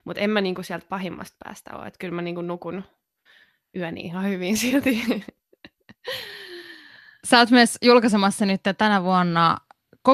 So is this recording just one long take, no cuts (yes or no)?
yes